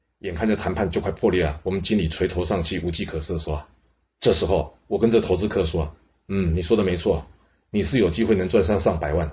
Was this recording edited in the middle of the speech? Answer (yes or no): no